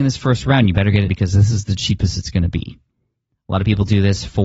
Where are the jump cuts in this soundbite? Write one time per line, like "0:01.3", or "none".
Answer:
0:01.1